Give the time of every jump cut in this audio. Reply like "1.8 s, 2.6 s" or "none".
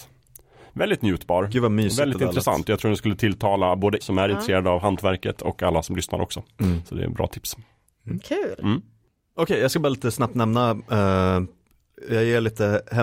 4.0 s, 7.9 s